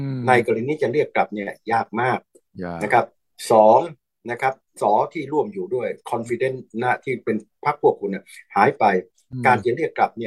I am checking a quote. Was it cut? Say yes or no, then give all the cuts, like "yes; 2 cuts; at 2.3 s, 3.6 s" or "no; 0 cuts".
yes; 1 cut; at 4.8 s